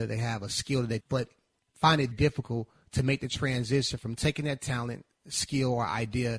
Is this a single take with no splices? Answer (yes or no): no